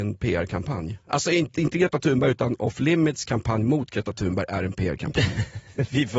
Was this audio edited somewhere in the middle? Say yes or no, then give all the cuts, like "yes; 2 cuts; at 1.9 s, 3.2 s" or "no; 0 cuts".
no; 0 cuts